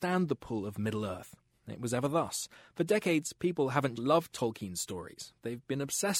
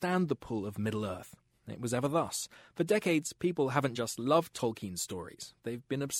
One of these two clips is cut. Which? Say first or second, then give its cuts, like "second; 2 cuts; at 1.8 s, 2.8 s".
first; 1 cut; at 3.9 s